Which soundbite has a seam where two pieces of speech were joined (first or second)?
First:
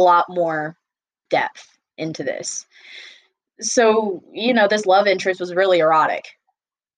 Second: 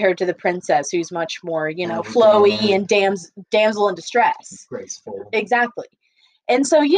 first